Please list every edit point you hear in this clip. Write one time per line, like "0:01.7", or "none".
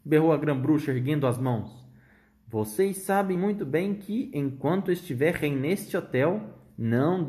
none